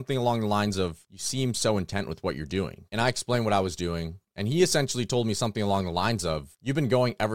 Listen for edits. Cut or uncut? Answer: cut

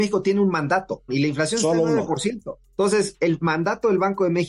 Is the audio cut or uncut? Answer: cut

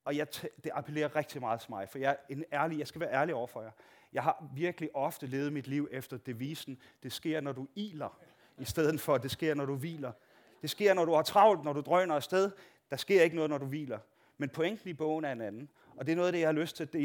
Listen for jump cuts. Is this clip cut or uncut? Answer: uncut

